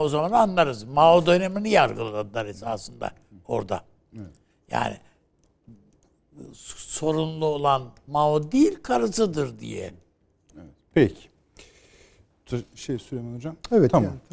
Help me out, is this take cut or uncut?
uncut